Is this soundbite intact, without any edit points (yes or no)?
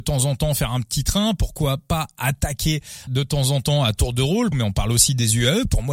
no